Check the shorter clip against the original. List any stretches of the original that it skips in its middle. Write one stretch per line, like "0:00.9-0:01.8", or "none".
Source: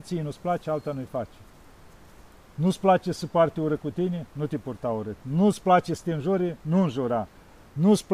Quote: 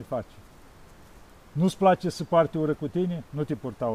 none